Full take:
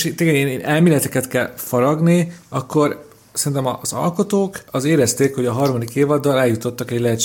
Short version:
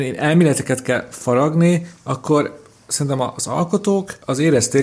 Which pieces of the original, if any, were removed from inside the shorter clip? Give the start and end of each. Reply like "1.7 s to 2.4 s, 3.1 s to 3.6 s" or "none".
none